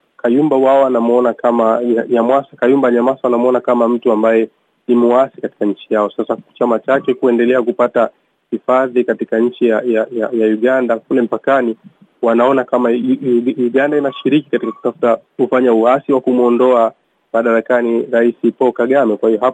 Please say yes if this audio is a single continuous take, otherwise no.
no